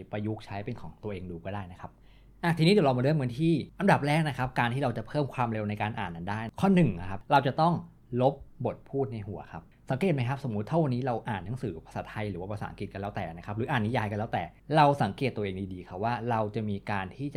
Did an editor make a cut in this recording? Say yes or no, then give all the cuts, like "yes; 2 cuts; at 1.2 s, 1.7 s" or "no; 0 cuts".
no; 0 cuts